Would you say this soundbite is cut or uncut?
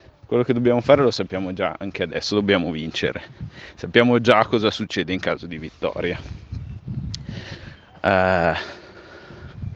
uncut